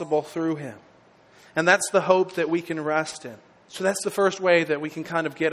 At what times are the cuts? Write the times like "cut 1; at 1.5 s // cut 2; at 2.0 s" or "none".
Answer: cut 1; at 3.6 s